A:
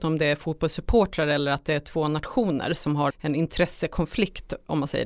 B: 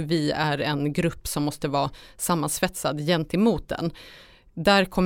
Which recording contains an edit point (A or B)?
A